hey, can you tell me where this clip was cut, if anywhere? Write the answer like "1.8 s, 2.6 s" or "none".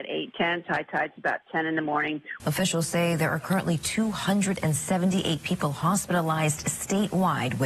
2.4 s